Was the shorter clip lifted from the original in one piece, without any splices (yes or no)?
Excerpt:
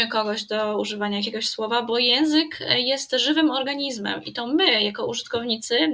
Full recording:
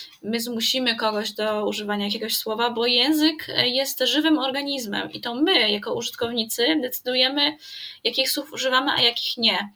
yes